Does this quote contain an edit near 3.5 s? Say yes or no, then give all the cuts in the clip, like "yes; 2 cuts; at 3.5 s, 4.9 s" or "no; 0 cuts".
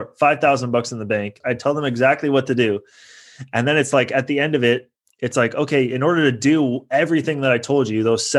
no; 1 cut; at 1.4 s